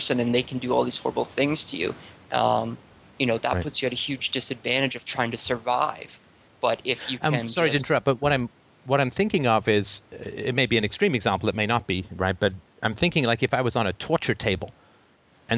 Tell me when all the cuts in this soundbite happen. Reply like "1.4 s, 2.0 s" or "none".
2.2 s